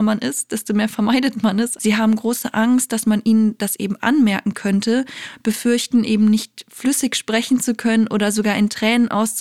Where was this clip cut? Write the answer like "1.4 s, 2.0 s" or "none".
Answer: 1.8 s

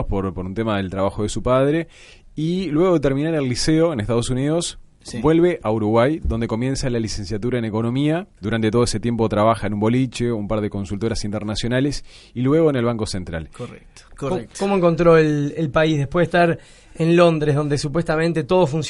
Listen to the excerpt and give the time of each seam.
8.3 s, 14.1 s

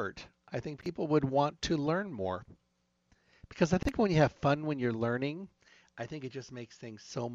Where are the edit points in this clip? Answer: none

